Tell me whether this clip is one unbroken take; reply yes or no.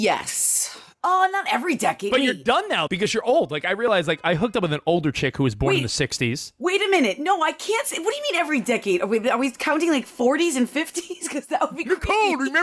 no